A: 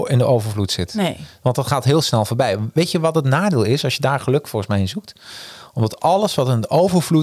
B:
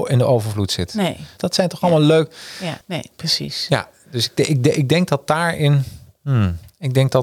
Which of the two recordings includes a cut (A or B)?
B